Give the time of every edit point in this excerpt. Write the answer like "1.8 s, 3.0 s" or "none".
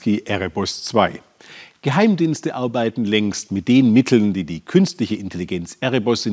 none